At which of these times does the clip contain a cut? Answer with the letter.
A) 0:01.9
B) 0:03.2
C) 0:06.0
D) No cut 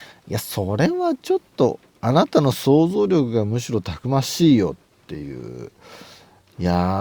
D